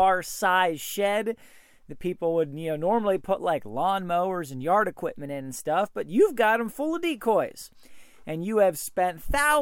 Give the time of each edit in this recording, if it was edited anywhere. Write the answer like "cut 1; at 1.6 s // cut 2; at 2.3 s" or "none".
none

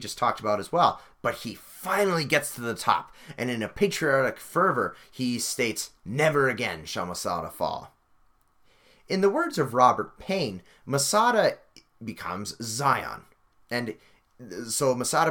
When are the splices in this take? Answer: cut 1; at 1.1 s

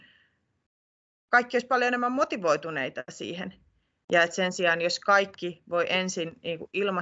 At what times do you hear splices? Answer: cut 1; at 4.0 s

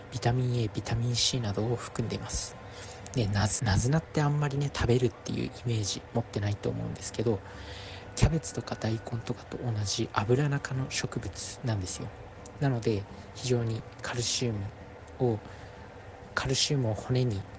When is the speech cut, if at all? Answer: cut 1; at 3.6 s

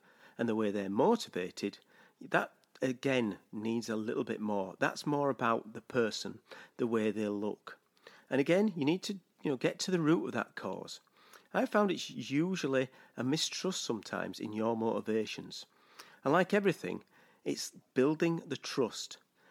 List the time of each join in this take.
cut 1; at 6.7 s

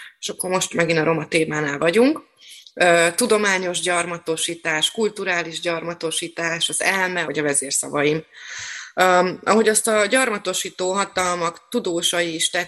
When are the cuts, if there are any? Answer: cut 1; at 7.2 s

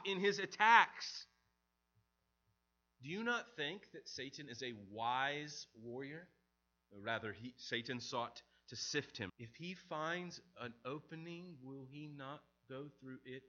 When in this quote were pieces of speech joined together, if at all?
cut 1; at 6.8 s // cut 2; at 9.3 s

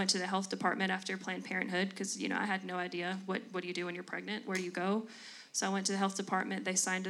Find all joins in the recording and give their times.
none

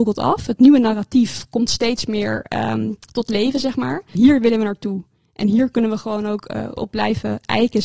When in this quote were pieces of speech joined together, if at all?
cut 1; at 4.1 s // cut 2; at 6.7 s

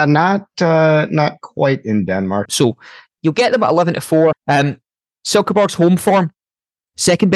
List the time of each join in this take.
cut 1; at 2.5 s // cut 2; at 4.3 s

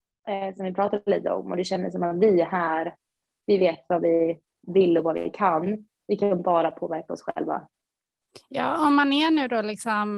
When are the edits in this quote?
none

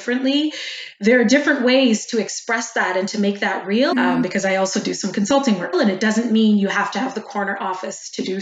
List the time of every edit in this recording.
cut 1; at 3.9 s // cut 2; at 5.7 s

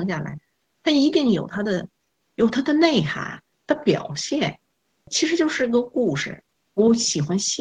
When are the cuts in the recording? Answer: cut 1; at 3.5 s

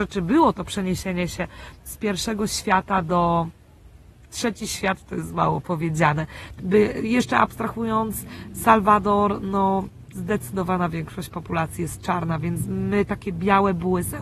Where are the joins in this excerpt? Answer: cut 1; at 6.6 s

